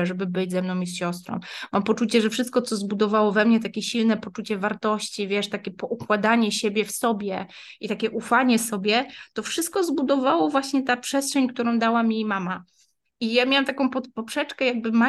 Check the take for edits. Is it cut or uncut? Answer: uncut